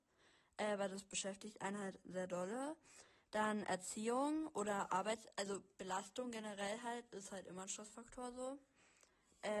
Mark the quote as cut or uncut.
uncut